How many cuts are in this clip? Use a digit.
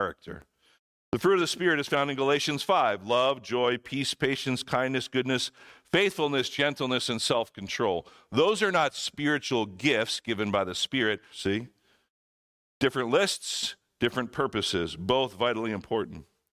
1